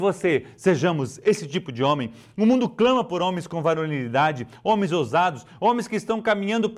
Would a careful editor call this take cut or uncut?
uncut